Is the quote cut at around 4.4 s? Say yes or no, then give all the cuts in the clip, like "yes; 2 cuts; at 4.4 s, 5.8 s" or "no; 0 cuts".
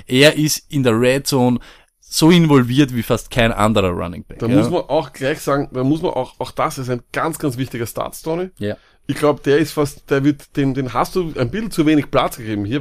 no; 0 cuts